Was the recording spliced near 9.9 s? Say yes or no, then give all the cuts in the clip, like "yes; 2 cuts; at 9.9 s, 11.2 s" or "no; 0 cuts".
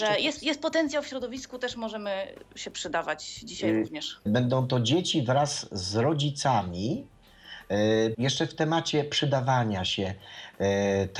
no; 2 cuts; at 4.3 s, 8.1 s